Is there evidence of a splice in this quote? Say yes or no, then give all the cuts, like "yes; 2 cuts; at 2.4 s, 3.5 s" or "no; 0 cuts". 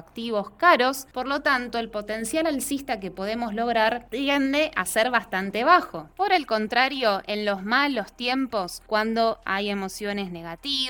no; 0 cuts